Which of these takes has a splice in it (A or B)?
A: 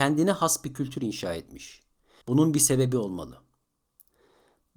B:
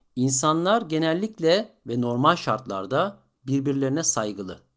A